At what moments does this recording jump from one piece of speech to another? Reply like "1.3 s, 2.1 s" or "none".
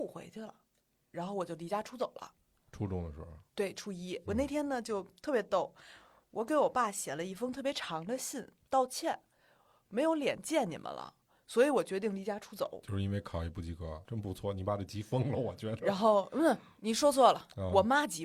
14.1 s